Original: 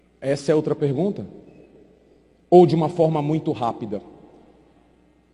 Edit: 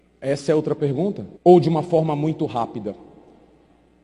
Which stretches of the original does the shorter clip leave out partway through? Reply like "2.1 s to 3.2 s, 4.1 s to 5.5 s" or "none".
1.4 s to 2.4 s